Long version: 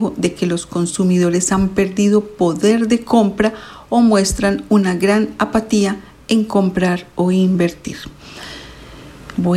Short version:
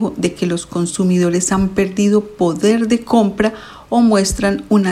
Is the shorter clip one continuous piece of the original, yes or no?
yes